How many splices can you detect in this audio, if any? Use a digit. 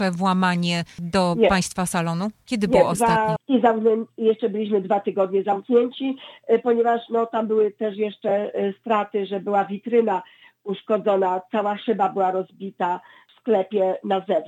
1